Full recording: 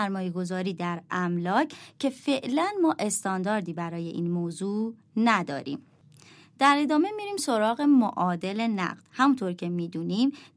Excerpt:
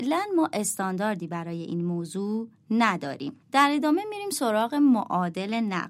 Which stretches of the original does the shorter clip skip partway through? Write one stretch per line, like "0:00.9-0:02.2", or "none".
0:05.9-0:06.5